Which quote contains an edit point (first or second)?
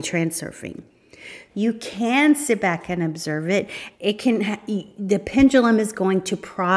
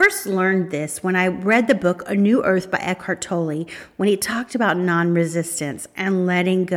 first